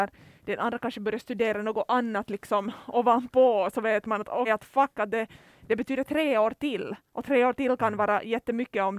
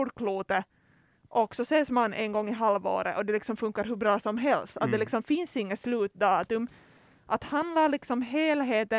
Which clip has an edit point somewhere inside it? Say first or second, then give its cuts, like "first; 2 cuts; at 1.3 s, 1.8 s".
first; 1 cut; at 4.4 s